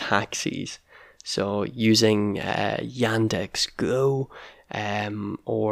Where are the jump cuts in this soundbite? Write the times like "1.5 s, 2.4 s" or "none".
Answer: none